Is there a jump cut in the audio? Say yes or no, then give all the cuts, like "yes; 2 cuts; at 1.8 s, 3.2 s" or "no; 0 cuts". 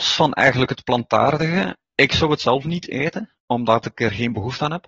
yes; 2 cuts; at 1.9 s, 3.4 s